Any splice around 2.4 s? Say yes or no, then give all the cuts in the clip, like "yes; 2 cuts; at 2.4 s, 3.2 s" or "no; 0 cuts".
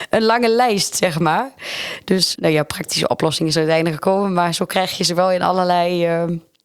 yes; 1 cut; at 2.4 s